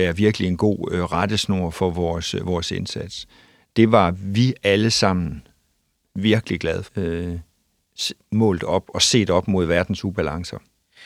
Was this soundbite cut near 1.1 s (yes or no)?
no